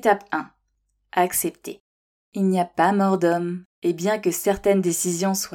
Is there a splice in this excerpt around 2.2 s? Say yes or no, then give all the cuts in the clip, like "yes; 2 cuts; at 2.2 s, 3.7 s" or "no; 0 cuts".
no; 0 cuts